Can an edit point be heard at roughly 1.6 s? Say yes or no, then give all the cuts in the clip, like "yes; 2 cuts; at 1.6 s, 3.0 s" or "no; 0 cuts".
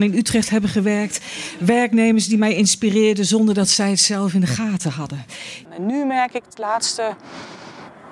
no; 1 cut; at 5.7 s